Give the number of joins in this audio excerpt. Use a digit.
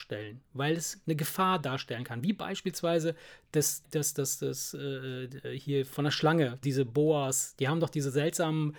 2